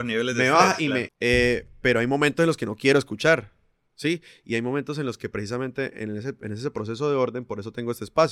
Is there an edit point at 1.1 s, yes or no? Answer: yes